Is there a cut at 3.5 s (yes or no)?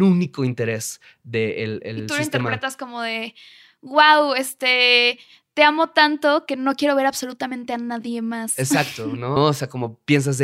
no